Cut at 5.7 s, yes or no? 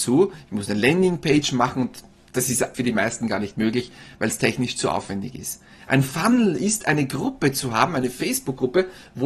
no